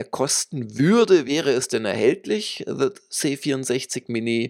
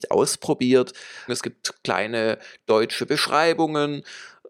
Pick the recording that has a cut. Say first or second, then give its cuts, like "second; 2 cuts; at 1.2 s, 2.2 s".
second; 1 cut; at 1.3 s